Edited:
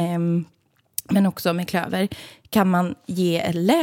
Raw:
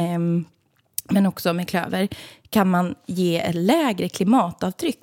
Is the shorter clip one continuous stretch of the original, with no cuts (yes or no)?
yes